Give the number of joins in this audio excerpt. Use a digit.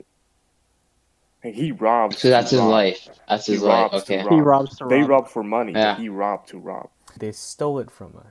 1